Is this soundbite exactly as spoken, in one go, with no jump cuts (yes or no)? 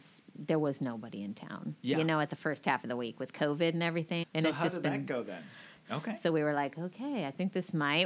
no